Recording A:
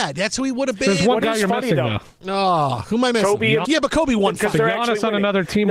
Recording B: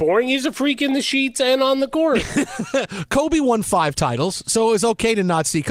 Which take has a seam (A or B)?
A